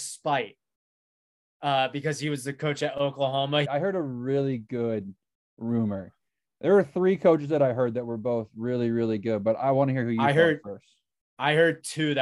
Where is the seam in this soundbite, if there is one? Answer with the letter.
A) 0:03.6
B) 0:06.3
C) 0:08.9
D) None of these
A